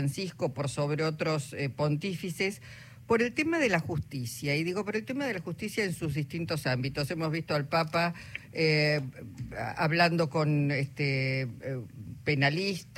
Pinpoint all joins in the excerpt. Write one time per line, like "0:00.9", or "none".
none